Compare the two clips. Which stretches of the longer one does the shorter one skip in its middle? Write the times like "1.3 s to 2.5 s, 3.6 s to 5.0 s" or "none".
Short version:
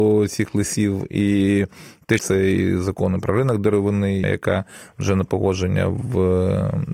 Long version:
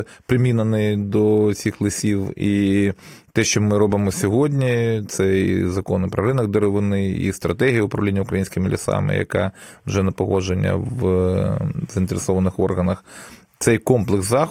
3.4 s to 5.1 s, 7.1 s to 9.1 s